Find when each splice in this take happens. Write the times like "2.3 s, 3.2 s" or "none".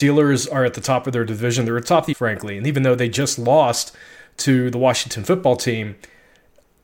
2.1 s